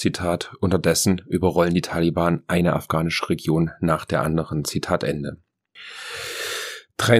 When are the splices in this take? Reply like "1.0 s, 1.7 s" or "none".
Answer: none